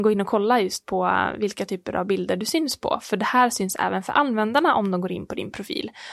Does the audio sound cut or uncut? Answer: uncut